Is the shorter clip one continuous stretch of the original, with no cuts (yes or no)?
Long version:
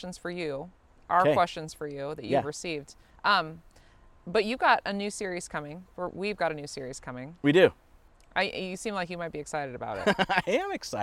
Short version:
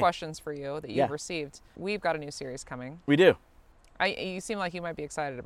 no